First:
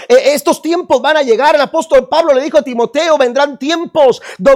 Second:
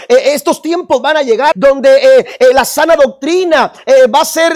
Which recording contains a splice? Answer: second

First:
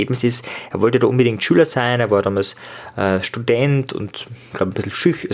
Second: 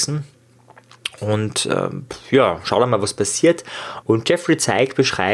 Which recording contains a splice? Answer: second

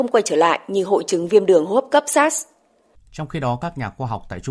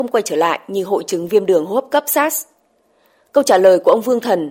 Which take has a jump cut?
first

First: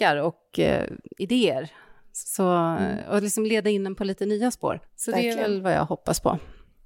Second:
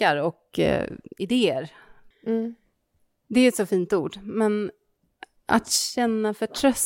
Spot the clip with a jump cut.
second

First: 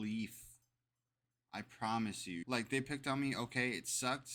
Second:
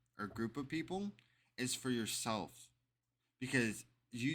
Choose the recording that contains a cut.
first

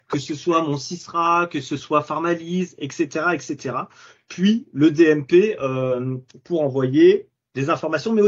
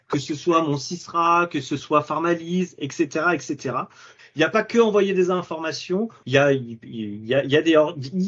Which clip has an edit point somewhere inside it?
second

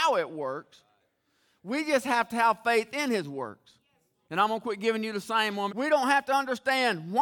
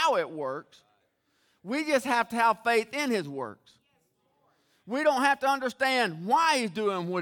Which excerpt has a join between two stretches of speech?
first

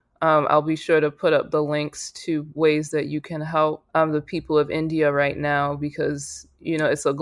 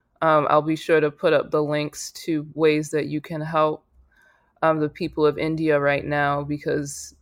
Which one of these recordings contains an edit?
first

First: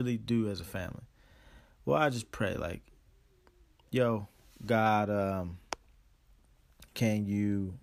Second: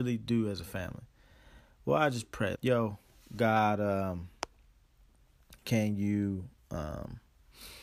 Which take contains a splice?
second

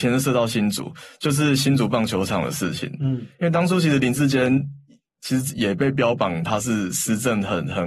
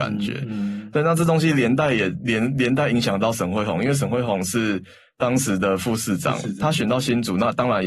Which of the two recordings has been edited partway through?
first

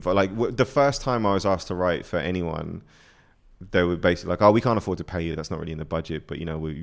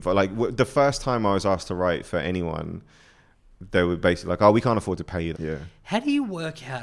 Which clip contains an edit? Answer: second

